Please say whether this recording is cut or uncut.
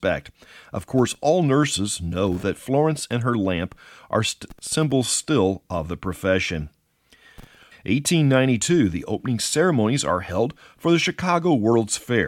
cut